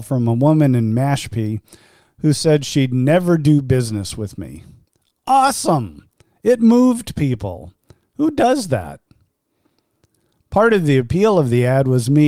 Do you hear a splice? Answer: yes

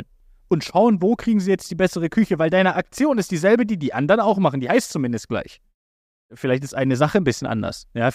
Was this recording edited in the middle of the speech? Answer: no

